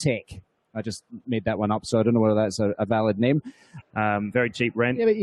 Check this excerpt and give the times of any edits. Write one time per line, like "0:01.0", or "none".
0:03.8